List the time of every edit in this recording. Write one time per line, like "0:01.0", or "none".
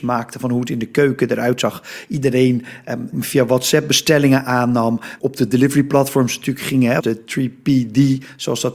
0:03.1
0:05.2
0:07.0